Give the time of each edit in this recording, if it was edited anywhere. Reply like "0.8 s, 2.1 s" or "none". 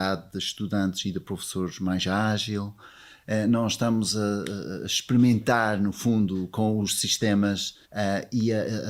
7.8 s